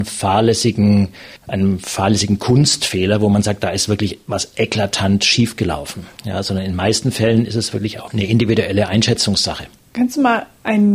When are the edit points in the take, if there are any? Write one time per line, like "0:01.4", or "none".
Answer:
0:01.4
0:08.1